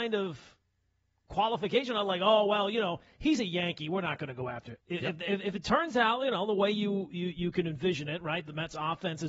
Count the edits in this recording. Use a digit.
1